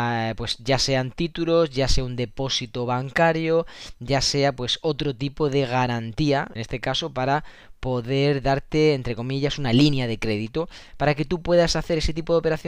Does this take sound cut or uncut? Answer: cut